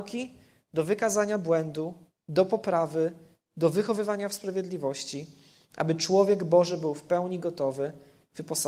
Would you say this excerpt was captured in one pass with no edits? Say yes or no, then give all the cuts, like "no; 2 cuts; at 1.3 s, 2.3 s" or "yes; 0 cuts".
yes; 0 cuts